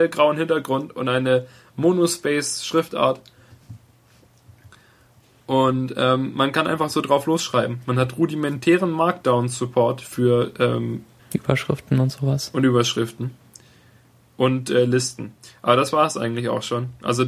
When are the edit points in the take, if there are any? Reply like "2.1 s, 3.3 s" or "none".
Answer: 11.2 s